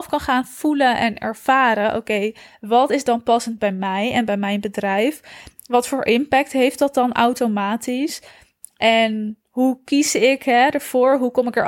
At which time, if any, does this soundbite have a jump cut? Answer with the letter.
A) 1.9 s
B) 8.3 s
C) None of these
C